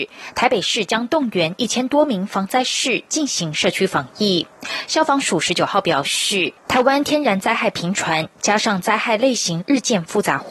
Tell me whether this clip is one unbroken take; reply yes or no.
no